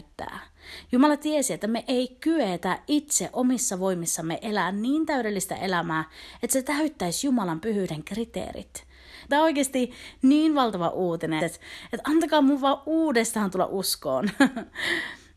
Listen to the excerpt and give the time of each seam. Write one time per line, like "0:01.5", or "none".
0:09.3
0:11.4